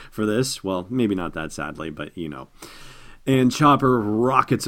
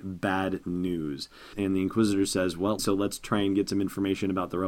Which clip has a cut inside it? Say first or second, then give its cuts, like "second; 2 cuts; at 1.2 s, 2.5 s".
second; 2 cuts; at 1.5 s, 2.8 s